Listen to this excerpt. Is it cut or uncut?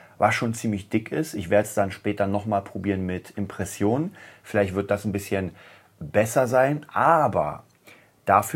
uncut